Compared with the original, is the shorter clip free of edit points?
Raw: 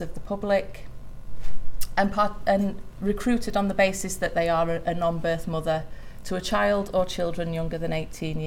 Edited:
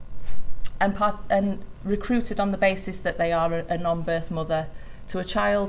yes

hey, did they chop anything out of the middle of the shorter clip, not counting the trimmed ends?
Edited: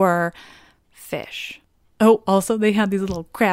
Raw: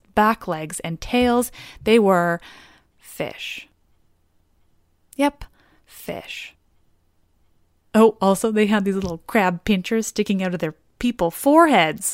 yes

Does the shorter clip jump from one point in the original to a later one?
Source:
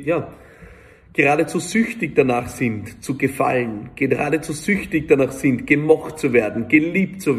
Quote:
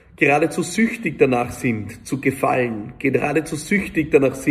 no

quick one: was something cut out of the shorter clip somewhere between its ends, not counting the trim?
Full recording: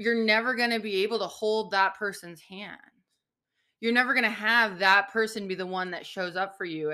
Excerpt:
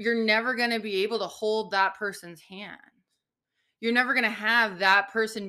no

